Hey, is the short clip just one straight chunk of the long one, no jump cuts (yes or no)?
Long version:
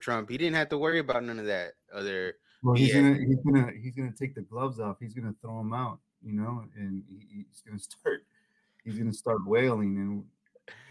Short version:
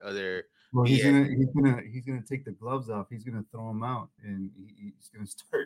no